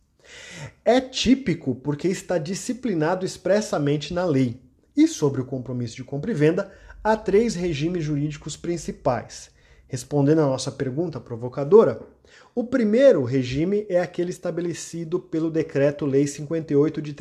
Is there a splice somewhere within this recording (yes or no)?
no